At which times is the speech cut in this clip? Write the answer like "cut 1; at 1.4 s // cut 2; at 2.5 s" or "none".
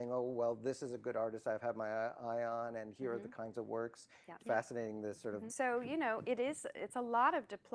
cut 1; at 4.4 s // cut 2; at 5.5 s